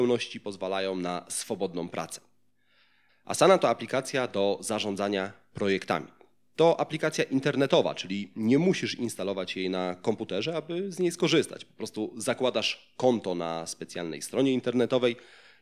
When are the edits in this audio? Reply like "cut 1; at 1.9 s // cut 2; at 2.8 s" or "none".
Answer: cut 1; at 3.1 s

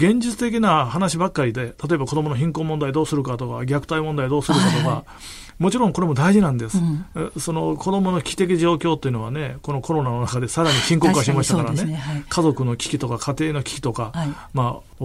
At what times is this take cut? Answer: none

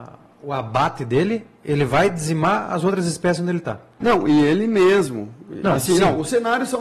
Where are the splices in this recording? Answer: cut 1; at 4.0 s

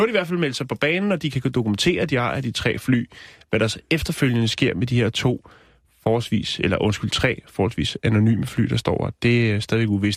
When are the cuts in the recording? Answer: none

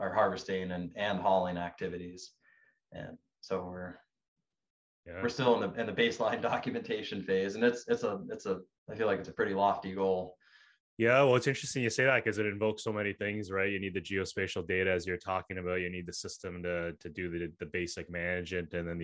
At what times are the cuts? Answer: cut 1; at 10.8 s

